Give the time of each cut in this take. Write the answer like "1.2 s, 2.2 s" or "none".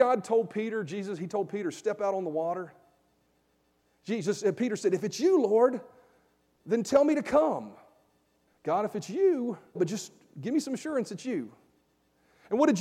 8.5 s, 9.7 s